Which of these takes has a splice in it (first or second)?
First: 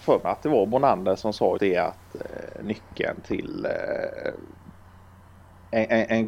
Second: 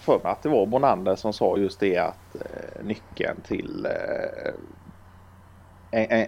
first